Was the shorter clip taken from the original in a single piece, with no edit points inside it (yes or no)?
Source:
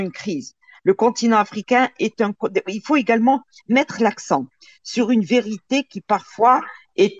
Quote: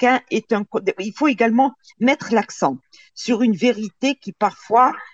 yes